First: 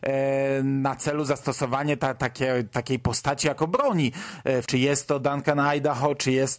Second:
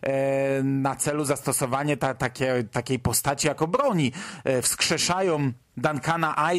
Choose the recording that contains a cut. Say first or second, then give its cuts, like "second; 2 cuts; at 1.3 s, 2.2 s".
first; 1 cut; at 4.6 s